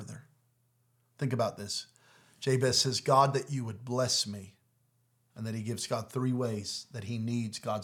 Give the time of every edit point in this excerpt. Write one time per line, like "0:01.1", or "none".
0:01.1